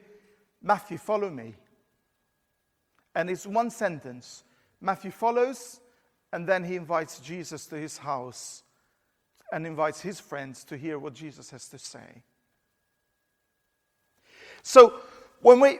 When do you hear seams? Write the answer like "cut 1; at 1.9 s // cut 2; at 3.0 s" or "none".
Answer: none